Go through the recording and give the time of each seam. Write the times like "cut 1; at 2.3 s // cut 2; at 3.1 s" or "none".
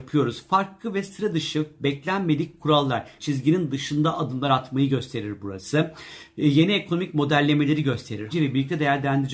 cut 1; at 3.2 s // cut 2; at 8.3 s